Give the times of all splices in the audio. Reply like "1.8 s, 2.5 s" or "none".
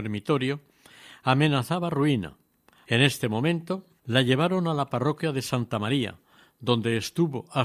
2.8 s, 4.0 s